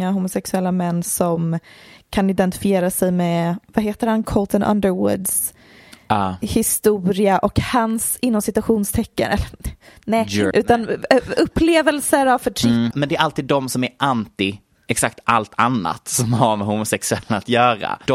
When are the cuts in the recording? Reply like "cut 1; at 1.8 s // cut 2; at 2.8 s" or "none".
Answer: cut 1; at 10.5 s // cut 2; at 12.9 s